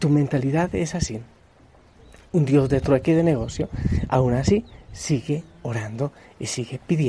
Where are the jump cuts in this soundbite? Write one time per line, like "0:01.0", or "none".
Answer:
none